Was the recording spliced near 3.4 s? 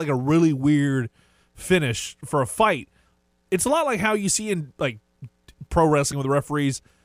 no; 1 cut; at 6.1 s

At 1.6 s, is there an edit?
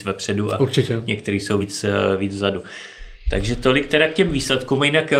no; 0 cuts

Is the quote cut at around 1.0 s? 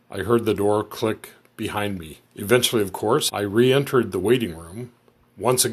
no; 2 cuts; at 2.3 s, 3.3 s

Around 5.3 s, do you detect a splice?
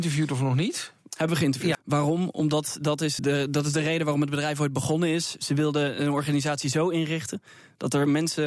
no; 2 cuts; at 1.7 s, 3.2 s

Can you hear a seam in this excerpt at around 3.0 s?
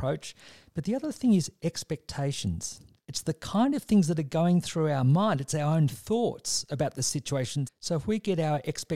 yes; 2 cuts; at 3.0 s, 7.6 s

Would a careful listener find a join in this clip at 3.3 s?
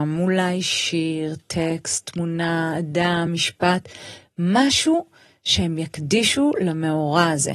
no; 0 cuts

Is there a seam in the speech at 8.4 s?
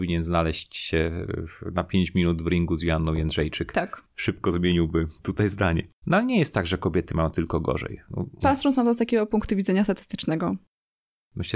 yes; 2 cuts; at 6.0 s, 8.4 s

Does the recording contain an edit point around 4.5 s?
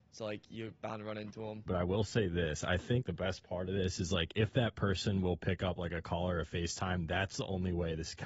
no; 2 cuts; at 1.7 s, 3.0 s

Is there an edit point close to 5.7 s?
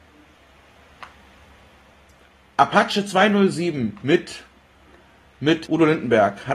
yes; 1 cut; at 5.7 s

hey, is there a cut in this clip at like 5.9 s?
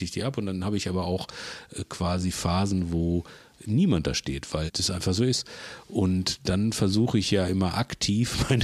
no; 1 cut; at 4.7 s

